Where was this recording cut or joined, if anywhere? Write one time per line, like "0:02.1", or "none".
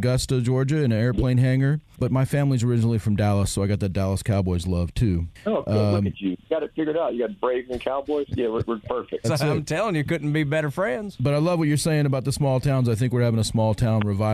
0:09.2